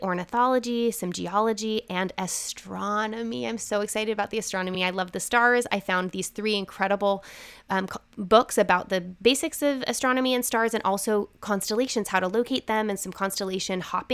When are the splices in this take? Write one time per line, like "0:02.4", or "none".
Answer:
none